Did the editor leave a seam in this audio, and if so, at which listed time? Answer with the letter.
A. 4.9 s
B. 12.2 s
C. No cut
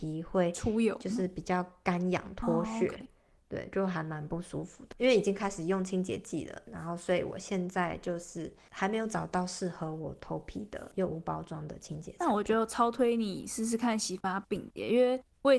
C